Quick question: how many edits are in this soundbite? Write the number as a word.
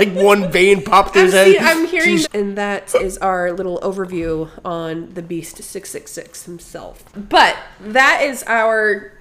one